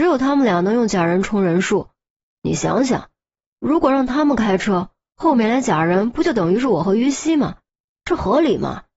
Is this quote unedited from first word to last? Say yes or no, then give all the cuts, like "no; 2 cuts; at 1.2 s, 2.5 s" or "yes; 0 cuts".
yes; 0 cuts